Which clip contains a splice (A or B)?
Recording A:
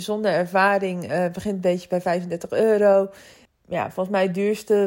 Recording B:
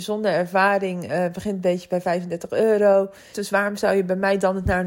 B